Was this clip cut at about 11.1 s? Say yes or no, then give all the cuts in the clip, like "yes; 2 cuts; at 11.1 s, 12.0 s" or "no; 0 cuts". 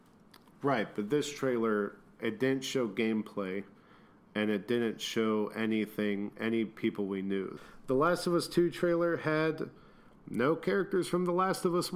no; 1 cut; at 7.6 s